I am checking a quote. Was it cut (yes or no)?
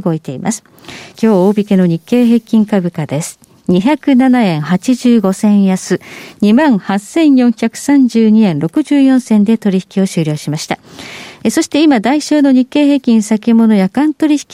yes